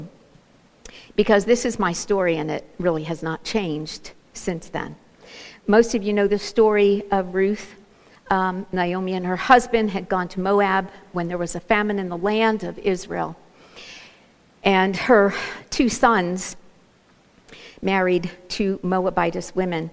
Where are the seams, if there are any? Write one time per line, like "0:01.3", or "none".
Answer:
0:08.2